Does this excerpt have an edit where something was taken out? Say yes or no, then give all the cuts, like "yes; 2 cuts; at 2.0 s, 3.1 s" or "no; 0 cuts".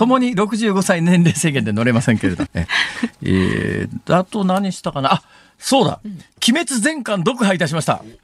yes; 1 cut; at 2.5 s